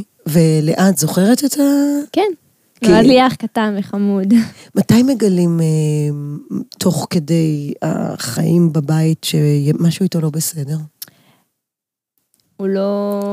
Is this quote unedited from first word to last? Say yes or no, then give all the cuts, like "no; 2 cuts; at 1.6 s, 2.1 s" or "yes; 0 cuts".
no; 1 cut; at 12.4 s